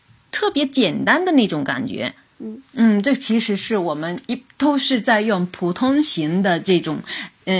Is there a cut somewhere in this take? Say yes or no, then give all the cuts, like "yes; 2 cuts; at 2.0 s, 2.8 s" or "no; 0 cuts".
no; 0 cuts